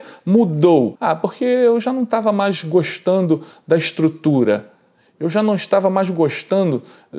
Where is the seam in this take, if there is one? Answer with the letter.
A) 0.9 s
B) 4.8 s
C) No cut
A